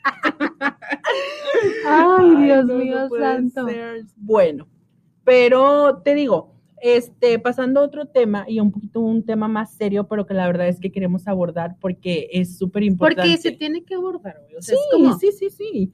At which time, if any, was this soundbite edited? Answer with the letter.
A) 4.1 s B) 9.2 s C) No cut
A